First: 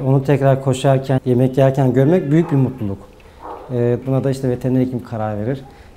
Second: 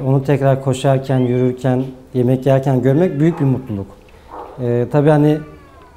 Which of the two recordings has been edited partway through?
first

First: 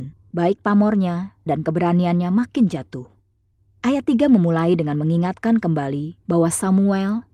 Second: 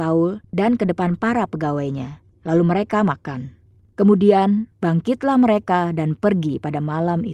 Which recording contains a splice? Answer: first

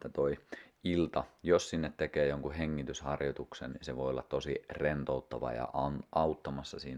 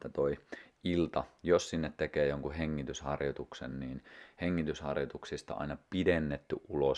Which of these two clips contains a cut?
first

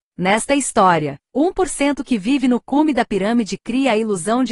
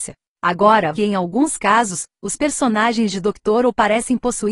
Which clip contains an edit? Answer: second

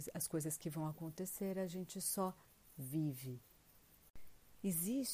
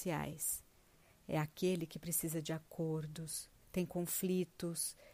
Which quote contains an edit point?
second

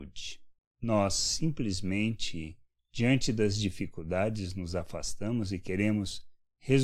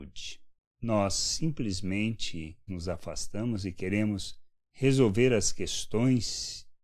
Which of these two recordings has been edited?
second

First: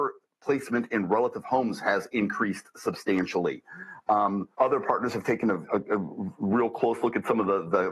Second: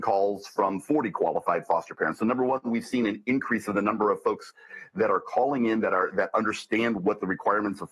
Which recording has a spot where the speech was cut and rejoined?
first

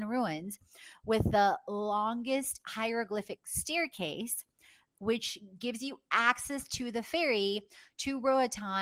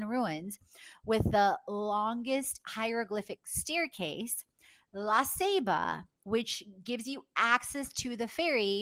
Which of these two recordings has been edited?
first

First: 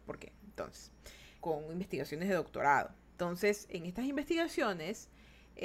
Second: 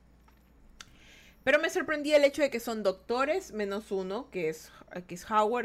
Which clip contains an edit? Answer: first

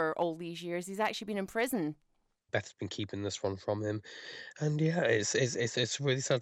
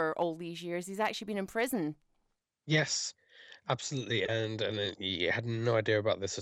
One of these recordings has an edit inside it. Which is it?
first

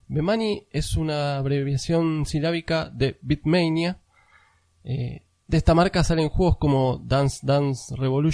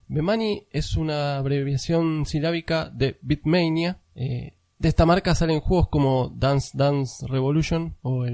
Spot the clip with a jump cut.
second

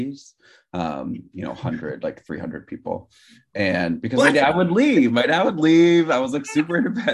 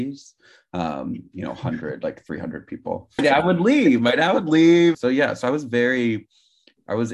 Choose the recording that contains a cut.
second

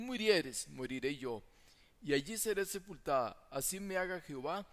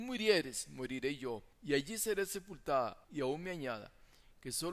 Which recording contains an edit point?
second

